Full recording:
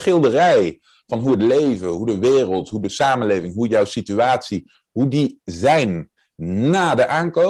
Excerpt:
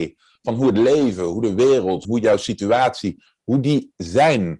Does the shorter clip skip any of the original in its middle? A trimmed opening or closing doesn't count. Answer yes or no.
yes